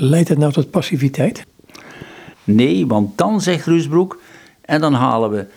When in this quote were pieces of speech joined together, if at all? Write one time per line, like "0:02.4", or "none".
0:02.3

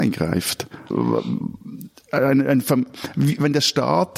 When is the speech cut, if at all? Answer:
0:00.9

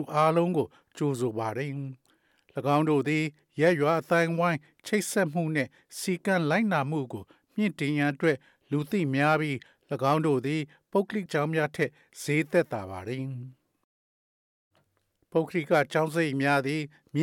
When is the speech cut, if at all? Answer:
0:11.3

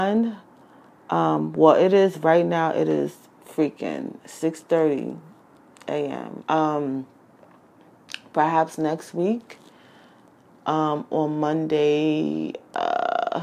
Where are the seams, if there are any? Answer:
0:06.4

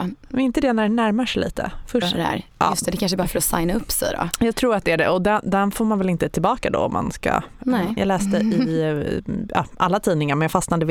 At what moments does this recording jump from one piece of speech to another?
0:02.0
0:08.0

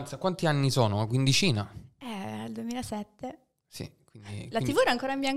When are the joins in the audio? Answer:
none

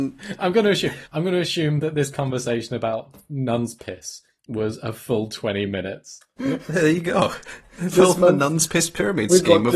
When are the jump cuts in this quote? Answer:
0:01.0
0:06.4

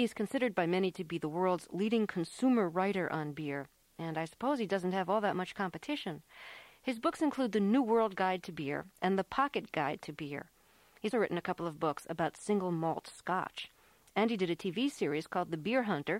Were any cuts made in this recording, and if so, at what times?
0:11.1

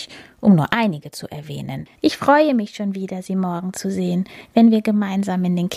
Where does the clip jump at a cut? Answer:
0:01.9

